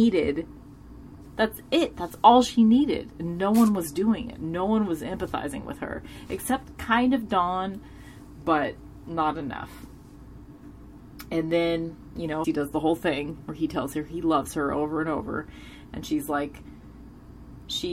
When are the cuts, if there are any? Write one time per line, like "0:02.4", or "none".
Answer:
0:12.4